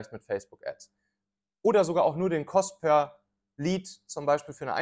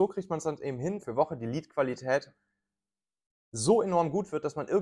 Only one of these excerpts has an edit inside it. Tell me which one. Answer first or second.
second